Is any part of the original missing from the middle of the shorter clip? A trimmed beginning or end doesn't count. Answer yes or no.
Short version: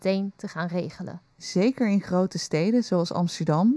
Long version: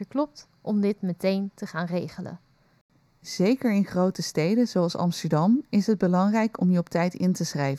yes